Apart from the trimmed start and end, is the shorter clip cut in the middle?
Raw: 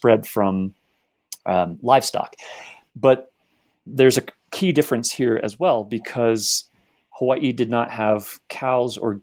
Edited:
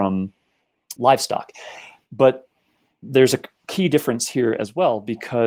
yes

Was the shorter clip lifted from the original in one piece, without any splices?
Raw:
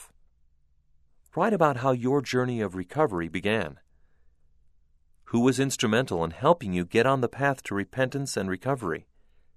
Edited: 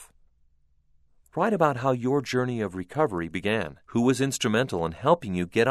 no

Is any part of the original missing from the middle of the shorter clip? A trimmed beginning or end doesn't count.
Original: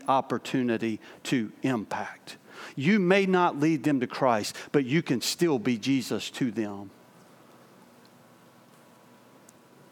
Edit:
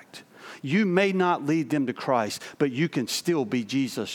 no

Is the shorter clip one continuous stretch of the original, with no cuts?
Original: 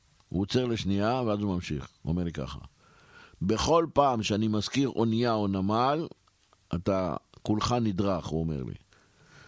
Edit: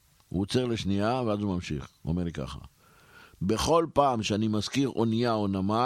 yes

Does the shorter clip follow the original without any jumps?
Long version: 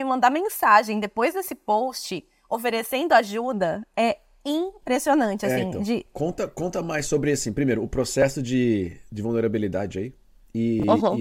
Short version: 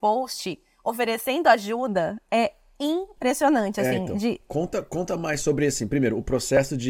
yes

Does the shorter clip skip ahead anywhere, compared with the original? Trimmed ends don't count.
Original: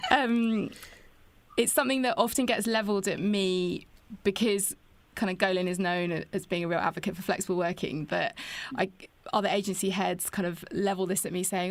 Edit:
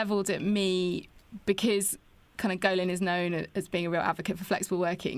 no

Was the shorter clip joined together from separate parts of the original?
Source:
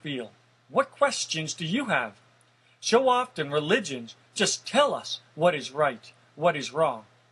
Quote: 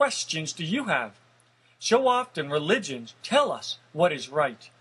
yes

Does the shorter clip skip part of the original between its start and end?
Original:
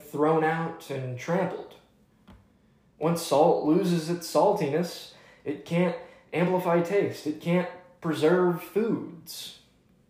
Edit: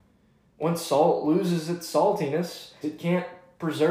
yes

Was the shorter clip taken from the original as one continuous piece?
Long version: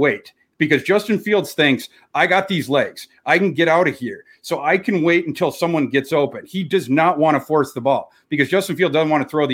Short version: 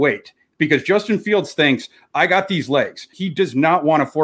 no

